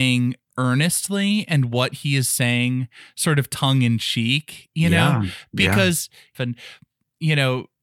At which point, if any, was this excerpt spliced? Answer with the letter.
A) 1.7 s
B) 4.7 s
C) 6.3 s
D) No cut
C